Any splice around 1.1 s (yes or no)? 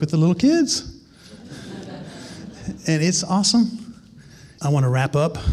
no